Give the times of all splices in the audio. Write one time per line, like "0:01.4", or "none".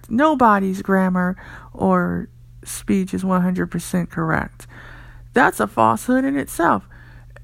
none